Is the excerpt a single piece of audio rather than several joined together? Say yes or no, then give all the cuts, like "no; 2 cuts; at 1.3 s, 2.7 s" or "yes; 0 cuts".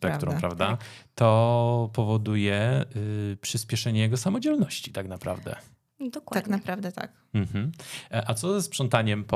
yes; 0 cuts